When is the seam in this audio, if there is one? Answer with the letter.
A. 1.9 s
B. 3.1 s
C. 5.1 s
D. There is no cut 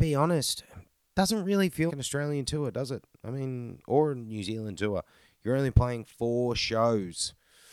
A